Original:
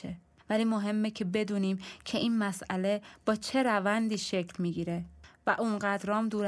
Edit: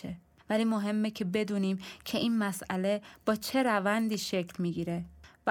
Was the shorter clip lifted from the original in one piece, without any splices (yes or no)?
yes